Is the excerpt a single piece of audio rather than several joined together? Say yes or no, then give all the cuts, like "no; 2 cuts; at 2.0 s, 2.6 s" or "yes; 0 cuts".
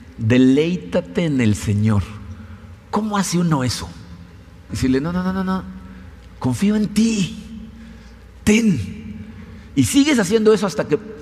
no; 1 cut; at 4.7 s